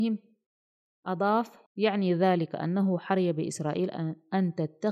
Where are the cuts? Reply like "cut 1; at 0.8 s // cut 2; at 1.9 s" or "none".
cut 1; at 1.7 s